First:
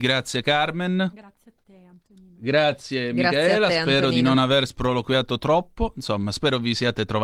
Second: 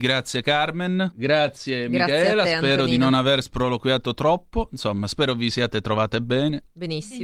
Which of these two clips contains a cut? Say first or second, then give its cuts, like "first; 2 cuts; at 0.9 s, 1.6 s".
second; 1 cut; at 1.1 s